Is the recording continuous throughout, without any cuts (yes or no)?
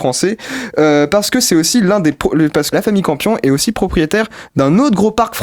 no